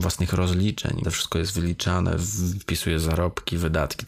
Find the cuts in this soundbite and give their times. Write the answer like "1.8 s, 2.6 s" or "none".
1.0 s